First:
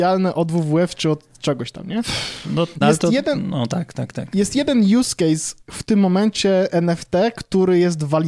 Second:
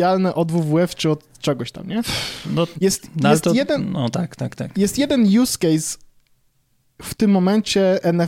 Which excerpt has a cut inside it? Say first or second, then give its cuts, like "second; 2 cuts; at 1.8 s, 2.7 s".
first; 2 cuts; at 2.8 s, 5.6 s